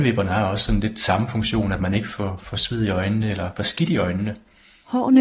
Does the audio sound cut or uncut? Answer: uncut